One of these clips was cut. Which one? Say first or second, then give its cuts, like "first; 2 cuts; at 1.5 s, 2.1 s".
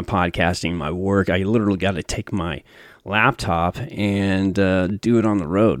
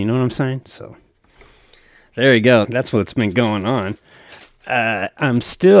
second; 1 cut; at 2.6 s